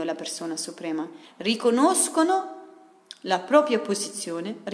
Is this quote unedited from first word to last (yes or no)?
no